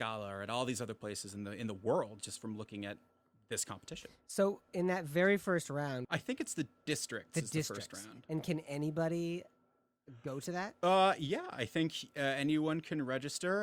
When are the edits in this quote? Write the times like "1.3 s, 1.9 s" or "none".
6.0 s

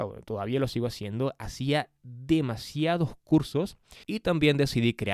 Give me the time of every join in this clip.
4.0 s

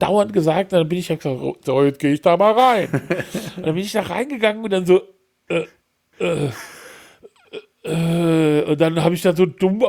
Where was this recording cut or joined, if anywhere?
none

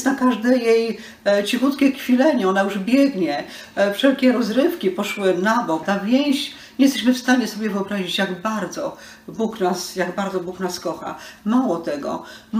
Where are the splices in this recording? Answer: 5.8 s

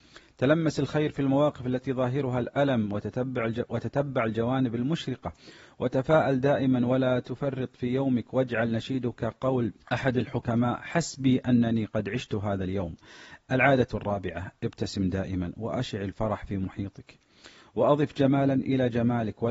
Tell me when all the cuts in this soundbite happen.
9.8 s

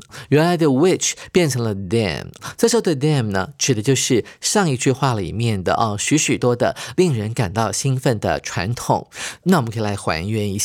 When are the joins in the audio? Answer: 6.4 s, 9.4 s

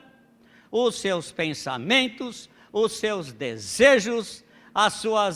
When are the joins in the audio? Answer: none

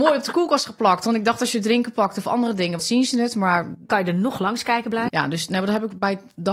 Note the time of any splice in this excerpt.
2.8 s, 5.1 s

